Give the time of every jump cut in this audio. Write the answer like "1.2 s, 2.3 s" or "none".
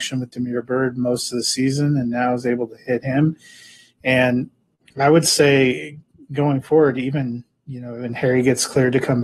none